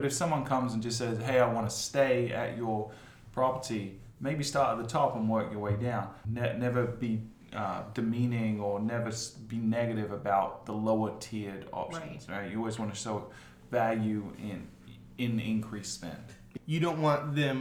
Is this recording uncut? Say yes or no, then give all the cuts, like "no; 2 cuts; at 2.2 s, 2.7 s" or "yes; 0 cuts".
no; 2 cuts; at 6.2 s, 16.6 s